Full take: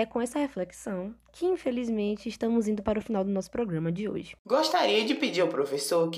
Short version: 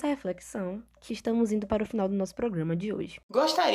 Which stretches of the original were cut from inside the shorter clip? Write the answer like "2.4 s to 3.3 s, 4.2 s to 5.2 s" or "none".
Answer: 1.4 s to 2.2 s